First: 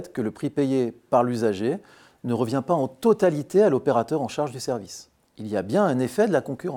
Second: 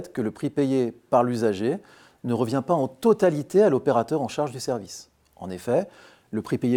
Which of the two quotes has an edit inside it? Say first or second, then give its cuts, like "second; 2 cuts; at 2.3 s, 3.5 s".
first; 1 cut; at 5.2 s